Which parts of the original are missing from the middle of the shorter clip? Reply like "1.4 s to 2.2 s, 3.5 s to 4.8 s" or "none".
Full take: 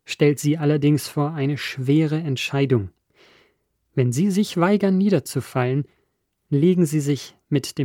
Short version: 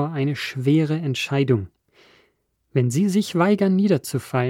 none